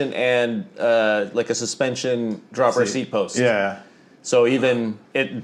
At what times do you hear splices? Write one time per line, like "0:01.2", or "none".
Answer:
none